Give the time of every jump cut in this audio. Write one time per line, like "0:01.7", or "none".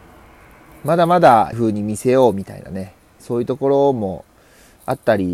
0:01.5